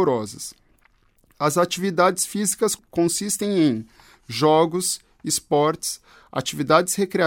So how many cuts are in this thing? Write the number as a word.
zero